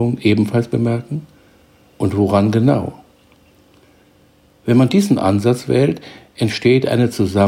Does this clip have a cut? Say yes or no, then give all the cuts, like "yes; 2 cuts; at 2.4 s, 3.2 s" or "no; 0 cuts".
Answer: no; 0 cuts